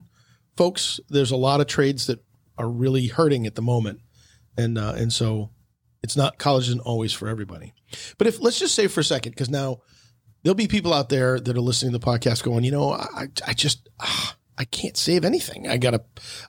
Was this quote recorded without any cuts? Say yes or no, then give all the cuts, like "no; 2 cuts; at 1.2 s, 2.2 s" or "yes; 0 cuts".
yes; 0 cuts